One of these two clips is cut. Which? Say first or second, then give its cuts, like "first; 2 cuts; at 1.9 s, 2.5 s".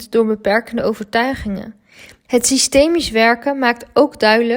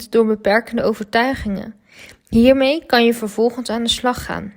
first; 1 cut; at 2.2 s